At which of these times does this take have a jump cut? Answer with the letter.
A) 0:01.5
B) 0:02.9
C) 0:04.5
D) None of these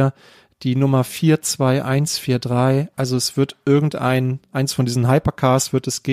B